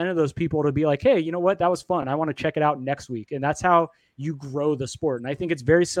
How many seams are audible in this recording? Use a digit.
0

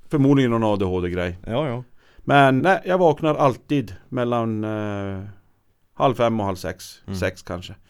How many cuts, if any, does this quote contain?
1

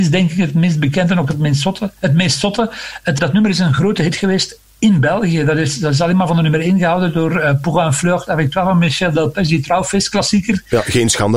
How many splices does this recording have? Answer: 1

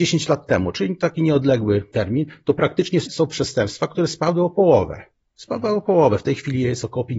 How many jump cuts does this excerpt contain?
1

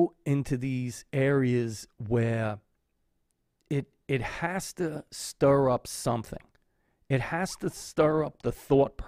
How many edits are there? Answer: 0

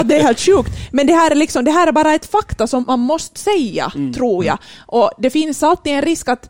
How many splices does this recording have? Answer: 1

